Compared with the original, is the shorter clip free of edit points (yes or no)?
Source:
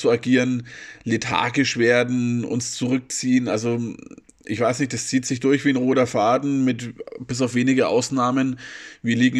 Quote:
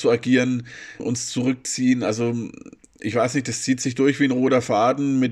no